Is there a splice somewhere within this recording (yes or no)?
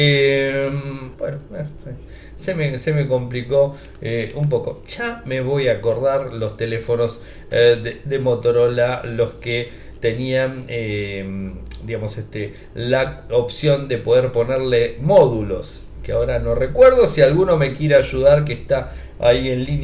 yes